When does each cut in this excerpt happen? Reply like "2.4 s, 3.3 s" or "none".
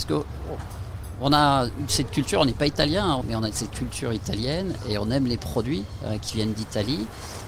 3.2 s